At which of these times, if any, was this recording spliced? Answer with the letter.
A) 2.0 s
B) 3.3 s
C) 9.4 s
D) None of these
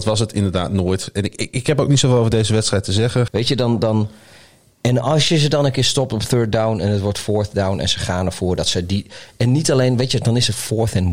B